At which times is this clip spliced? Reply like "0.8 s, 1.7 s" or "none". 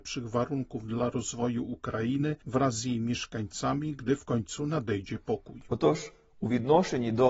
none